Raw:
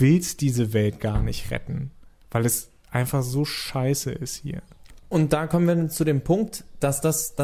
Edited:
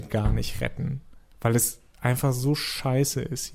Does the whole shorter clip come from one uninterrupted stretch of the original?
yes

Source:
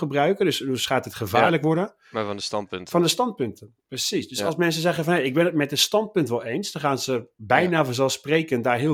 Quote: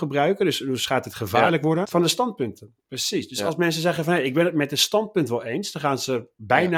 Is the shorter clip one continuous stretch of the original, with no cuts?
no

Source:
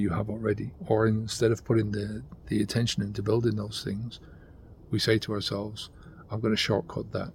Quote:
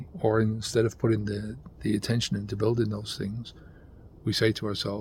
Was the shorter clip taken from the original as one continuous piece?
yes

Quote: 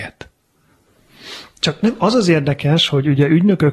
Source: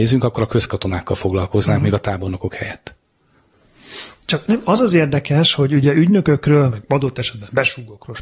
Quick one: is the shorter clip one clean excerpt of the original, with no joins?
yes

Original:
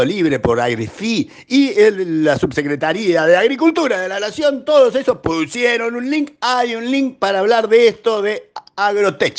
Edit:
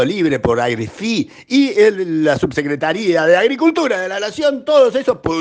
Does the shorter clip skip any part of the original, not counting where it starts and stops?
no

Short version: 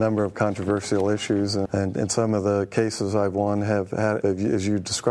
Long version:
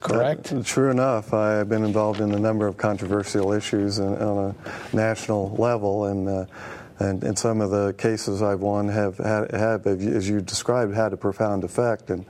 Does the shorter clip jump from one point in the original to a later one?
yes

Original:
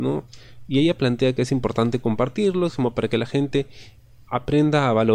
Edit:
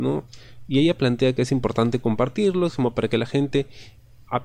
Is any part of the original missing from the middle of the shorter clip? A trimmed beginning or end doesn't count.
no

